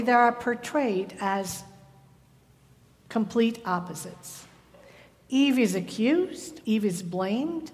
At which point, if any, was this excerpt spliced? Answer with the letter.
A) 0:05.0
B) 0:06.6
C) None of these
B